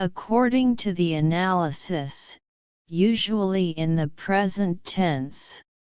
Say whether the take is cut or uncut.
cut